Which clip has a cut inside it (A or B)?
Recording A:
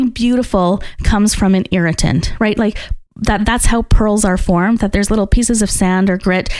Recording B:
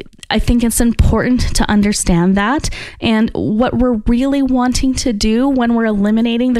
A